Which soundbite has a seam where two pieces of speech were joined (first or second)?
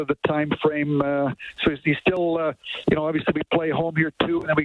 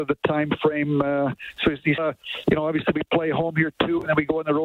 second